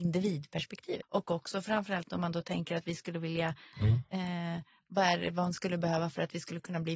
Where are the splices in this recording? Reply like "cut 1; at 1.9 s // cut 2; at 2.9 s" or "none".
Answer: cut 1; at 1.0 s // cut 2; at 3.7 s